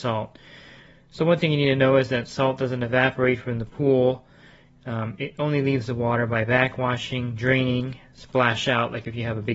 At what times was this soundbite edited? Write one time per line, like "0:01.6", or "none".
none